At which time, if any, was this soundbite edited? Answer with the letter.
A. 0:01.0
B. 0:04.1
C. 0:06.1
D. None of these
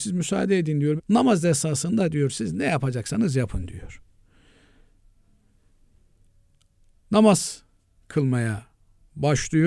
A